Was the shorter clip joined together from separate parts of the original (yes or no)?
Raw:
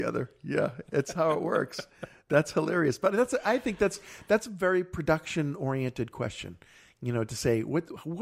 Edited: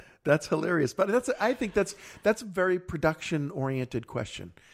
no